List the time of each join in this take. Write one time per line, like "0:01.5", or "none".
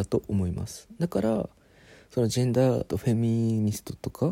0:02.9